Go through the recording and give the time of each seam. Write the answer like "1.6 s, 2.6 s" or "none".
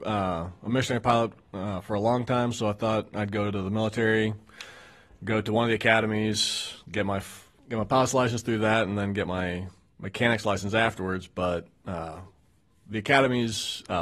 none